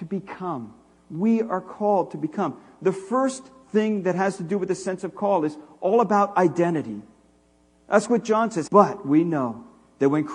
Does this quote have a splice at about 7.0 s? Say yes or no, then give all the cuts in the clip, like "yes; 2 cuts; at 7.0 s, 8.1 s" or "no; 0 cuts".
no; 1 cut; at 8.7 s